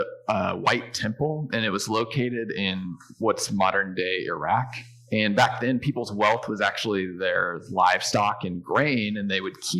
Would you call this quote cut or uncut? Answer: uncut